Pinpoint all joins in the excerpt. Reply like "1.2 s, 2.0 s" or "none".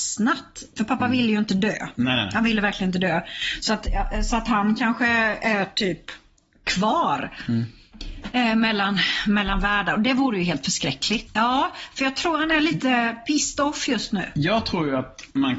11.3 s